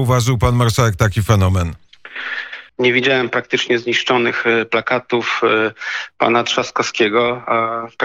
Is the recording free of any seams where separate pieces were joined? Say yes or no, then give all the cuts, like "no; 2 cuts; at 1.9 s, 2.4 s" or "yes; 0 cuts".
no; 1 cut; at 2.7 s